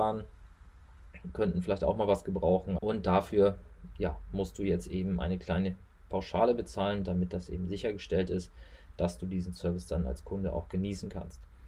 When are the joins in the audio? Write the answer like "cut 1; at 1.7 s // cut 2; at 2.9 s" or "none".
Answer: cut 1; at 2.8 s